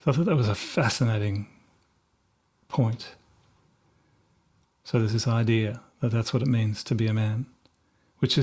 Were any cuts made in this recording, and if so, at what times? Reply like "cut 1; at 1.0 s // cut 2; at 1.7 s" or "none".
cut 1; at 4.6 s